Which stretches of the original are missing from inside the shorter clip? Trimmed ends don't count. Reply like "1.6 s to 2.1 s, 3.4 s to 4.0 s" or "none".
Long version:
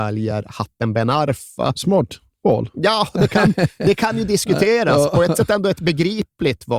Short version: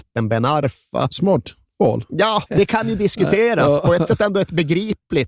3.1 s to 3.8 s